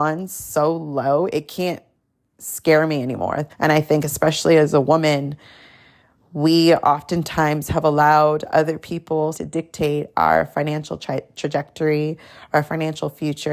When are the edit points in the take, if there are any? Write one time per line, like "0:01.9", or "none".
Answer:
0:03.5
0:09.3